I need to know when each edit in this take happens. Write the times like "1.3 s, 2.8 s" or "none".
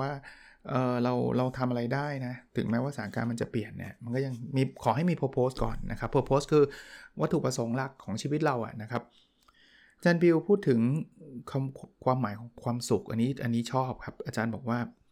none